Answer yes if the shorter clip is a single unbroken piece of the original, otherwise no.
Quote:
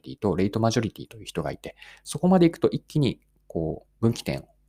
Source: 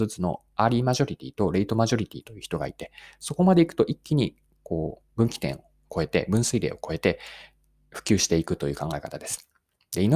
yes